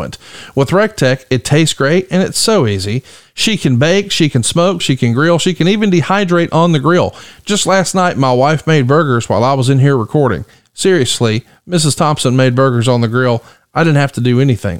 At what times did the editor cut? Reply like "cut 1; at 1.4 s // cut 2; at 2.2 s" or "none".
cut 1; at 4.8 s